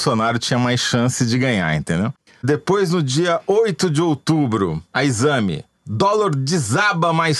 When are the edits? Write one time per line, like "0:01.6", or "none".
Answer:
none